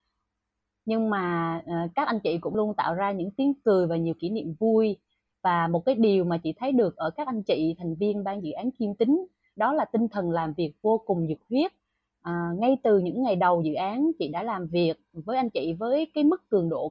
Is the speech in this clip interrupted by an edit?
yes; 1 cut; at 2.5 s

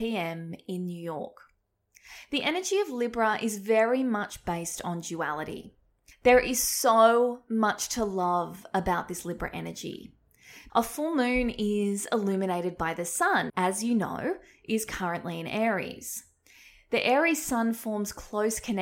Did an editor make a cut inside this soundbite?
yes; 3 cuts; at 6.1 s, 10.7 s, 13.5 s

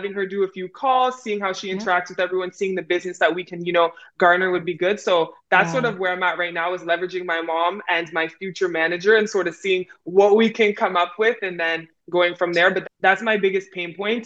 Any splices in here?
yes; 1 cut; at 12.8 s

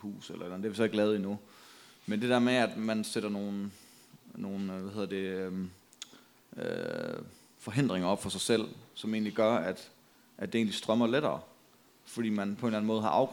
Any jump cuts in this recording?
no; 0 cuts

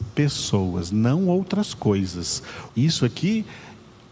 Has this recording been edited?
yes; 1 cut; at 2.7 s

